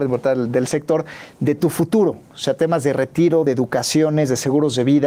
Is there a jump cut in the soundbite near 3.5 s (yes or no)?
no